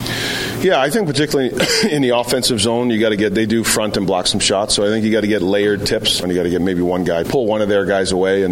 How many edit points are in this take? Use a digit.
2